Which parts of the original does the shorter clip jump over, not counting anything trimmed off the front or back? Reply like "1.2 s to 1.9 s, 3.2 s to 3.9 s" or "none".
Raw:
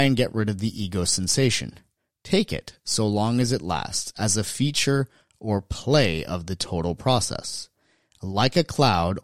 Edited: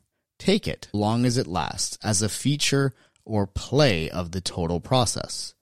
2.8 s to 3.1 s